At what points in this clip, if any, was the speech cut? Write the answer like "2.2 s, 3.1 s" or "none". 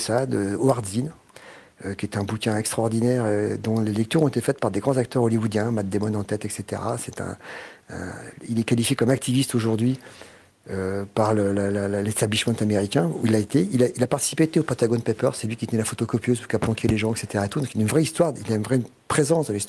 none